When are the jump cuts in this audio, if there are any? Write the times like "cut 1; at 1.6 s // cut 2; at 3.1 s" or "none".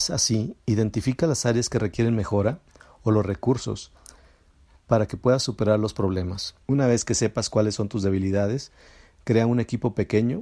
cut 1; at 6.6 s